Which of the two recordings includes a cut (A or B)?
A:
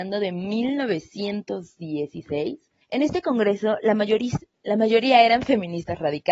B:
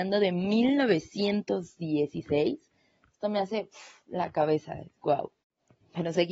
A